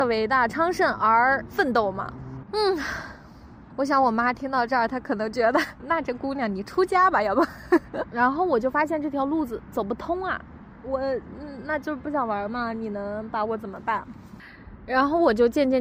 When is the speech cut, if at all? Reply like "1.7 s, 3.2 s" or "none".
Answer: 2.5 s, 8.0 s, 10.8 s